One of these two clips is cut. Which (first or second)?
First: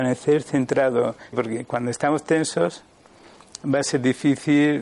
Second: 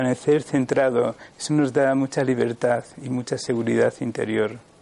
first